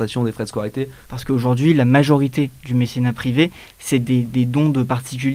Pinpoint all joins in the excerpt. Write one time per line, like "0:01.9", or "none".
0:01.1